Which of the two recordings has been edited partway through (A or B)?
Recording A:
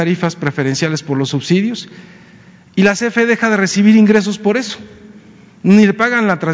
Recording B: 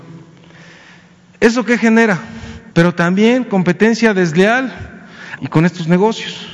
B